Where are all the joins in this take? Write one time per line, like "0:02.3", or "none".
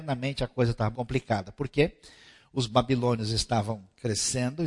0:00.9